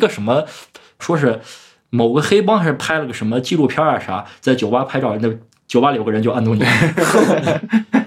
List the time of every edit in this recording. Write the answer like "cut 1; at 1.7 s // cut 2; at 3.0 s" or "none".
cut 1; at 1.0 s

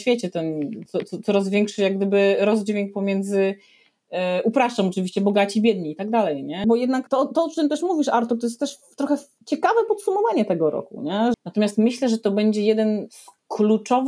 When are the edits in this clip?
cut 1; at 6.6 s // cut 2; at 11.3 s

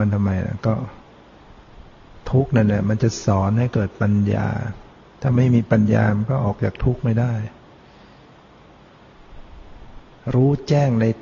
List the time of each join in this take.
none

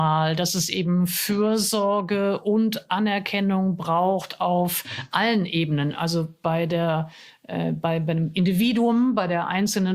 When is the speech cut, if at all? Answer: none

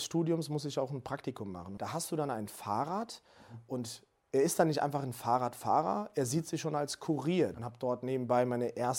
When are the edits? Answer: cut 1; at 1.8 s // cut 2; at 7.5 s

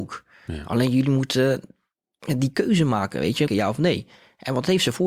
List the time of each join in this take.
cut 1; at 3.5 s

